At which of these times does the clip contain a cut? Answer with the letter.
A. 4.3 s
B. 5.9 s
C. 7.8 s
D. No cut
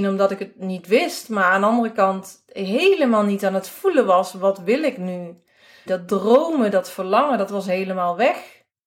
B